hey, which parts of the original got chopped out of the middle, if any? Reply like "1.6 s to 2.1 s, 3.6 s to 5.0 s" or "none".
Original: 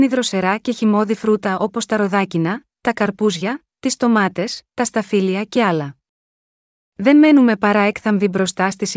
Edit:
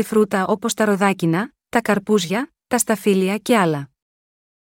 3.7 s to 4.7 s